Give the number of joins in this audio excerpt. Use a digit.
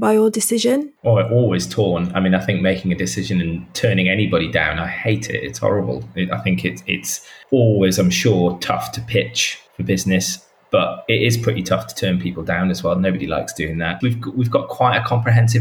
2